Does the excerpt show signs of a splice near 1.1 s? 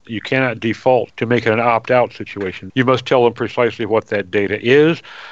yes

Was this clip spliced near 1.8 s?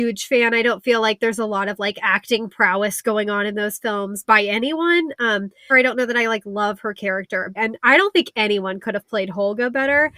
no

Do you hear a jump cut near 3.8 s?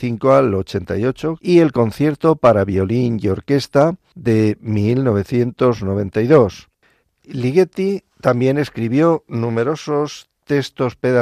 no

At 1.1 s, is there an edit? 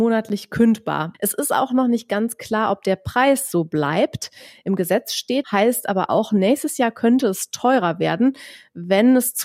yes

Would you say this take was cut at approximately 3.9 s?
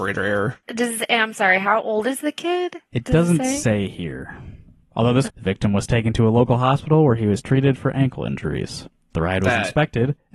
no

